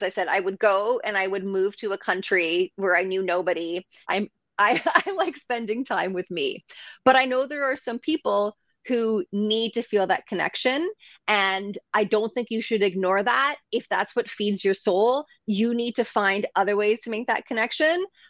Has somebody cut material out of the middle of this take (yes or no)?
yes